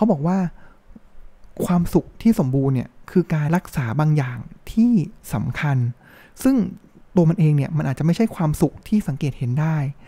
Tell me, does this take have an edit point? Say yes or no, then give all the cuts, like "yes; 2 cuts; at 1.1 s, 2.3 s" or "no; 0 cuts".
yes; 1 cut; at 3.5 s